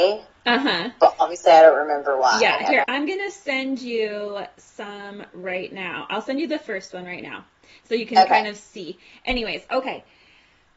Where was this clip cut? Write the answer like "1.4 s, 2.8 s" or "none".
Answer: 2.8 s

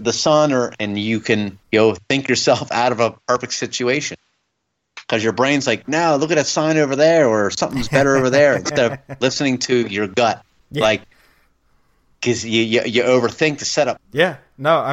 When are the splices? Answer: 1.6 s, 10.6 s, 14.0 s

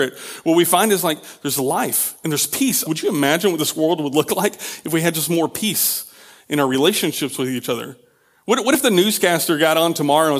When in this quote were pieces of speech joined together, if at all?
2.8 s

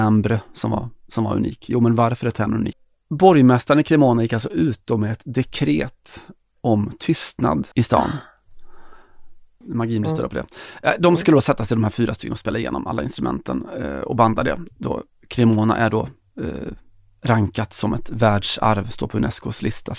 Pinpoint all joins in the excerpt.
2.7 s, 7.7 s, 9.6 s

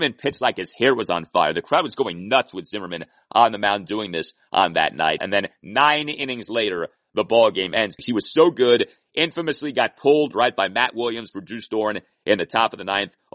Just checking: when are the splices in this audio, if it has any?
5.2 s, 8.0 s

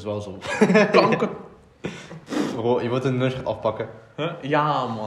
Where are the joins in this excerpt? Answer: none

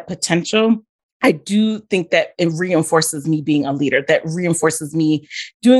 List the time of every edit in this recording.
none

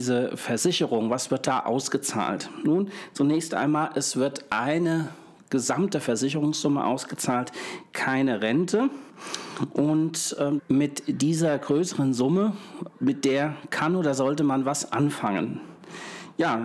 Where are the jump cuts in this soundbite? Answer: 10.6 s, 12.9 s

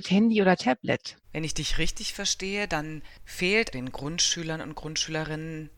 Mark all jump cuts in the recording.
1.2 s, 3.7 s

